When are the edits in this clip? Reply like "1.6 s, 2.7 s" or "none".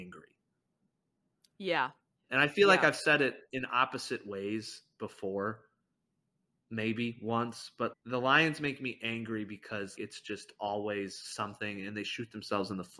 7.9 s, 10.0 s